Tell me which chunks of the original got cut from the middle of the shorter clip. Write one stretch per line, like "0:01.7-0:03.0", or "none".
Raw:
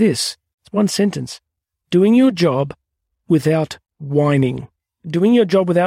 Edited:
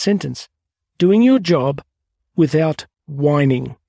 none